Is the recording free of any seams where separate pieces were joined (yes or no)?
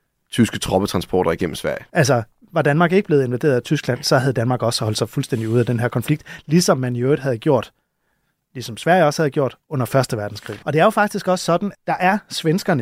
no